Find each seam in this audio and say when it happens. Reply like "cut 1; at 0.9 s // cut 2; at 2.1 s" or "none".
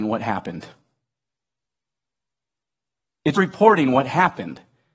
cut 1; at 3.3 s